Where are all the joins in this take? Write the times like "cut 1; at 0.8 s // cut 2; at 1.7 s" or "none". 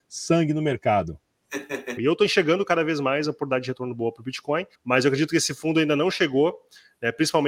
cut 1; at 2.0 s // cut 2; at 4.7 s